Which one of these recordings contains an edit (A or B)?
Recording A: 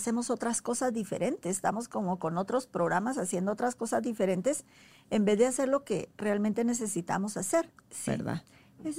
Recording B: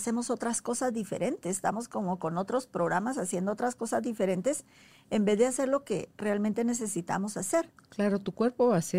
A